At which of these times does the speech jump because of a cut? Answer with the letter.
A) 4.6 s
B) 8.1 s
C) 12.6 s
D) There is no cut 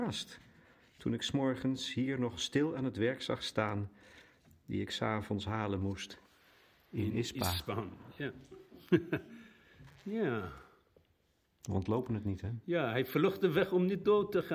D